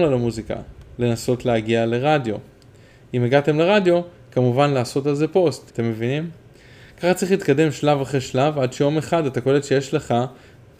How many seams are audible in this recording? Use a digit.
1